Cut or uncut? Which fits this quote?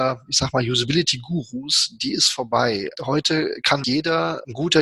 cut